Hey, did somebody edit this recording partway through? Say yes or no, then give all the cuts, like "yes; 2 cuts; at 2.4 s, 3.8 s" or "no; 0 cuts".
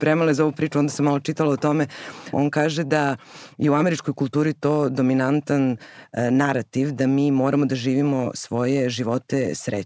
yes; 1 cut; at 2.3 s